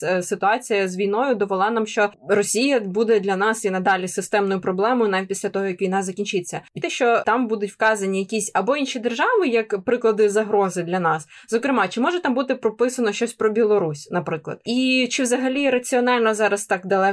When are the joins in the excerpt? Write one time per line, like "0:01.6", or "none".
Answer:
0:06.8

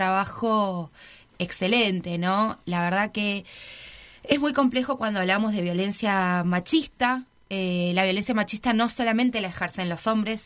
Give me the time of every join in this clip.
none

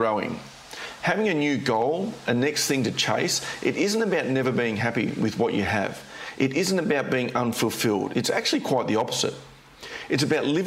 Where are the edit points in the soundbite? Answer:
none

